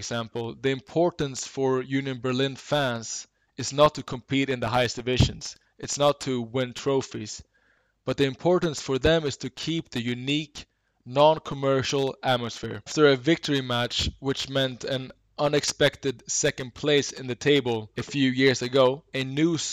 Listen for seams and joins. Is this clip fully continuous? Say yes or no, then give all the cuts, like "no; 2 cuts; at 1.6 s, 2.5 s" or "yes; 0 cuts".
no; 1 cut; at 12.9 s